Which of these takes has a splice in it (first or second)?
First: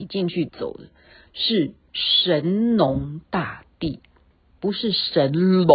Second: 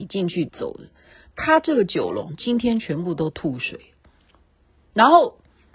first